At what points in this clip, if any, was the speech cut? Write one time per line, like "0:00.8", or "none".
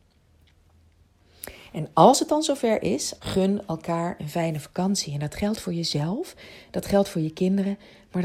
0:03.2